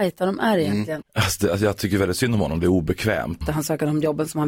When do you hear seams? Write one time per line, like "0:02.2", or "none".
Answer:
0:01.0
0:03.4